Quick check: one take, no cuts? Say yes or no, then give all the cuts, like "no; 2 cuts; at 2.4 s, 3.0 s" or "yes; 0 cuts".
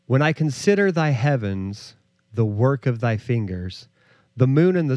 yes; 0 cuts